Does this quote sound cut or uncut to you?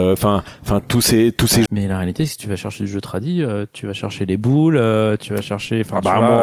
cut